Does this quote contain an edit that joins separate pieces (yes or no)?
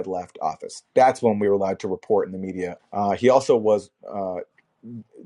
yes